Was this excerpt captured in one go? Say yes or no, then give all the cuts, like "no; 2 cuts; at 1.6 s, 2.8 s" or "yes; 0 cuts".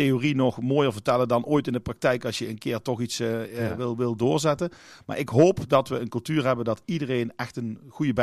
yes; 0 cuts